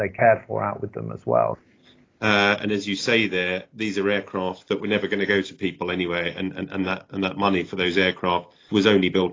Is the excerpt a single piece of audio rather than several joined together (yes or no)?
no